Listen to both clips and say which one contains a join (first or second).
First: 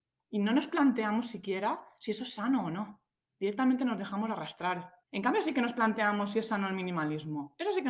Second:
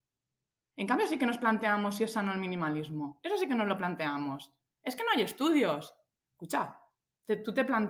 first